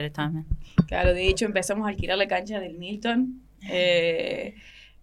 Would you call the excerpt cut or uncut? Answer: uncut